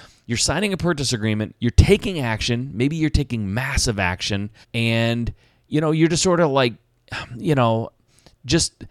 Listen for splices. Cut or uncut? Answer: cut